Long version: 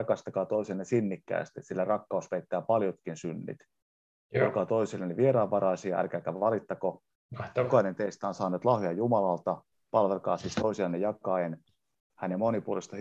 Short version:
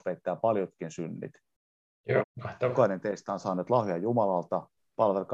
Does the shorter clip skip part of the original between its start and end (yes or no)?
yes